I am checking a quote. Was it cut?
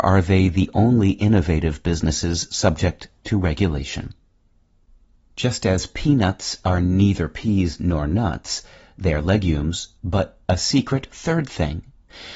yes; 1 cut; at 10.0 s

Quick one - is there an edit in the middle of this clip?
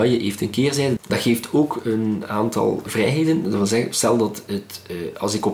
yes; 1 cut; at 1.0 s

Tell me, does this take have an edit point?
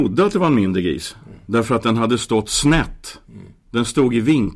no; 0 cuts

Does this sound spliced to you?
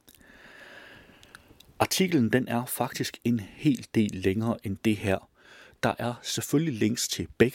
no; 0 cuts

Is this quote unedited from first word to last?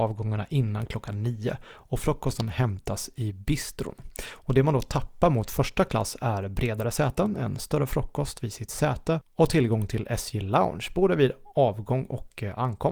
yes; 0 cuts

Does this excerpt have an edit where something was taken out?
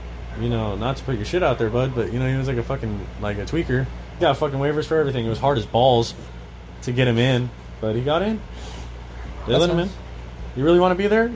yes; 1 cut; at 4.2 s

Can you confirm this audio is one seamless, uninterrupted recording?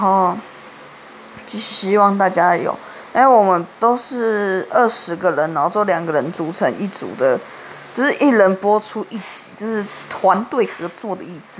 yes; 0 cuts

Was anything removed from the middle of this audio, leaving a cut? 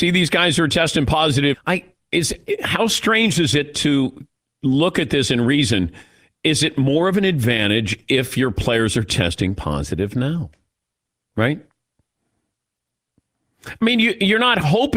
yes; 1 cut; at 1.5 s

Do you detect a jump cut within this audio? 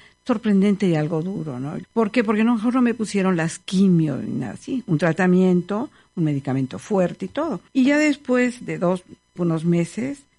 yes; 3 cuts; at 1.8 s, 7.7 s, 9.4 s

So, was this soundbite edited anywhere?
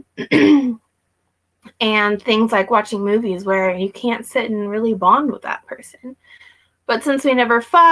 no; 0 cuts

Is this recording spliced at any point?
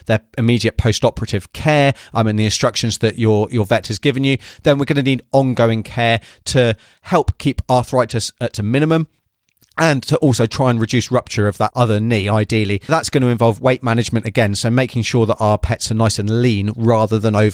yes; 2 cuts; at 11.7 s, 12.9 s

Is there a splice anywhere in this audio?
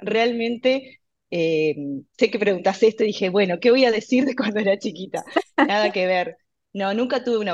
no; 0 cuts

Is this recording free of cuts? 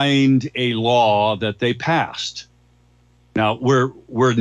yes; 0 cuts

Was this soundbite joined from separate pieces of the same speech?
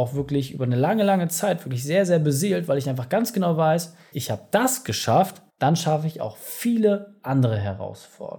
yes; 2 cuts; at 4.1 s, 5.5 s

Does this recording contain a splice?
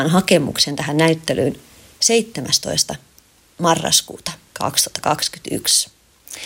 no; 0 cuts

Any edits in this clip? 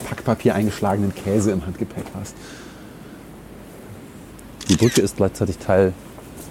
no; 0 cuts

